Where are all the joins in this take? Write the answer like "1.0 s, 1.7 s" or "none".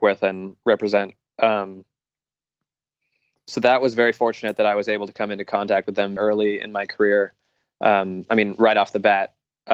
6.2 s